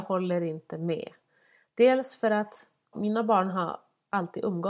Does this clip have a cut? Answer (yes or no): yes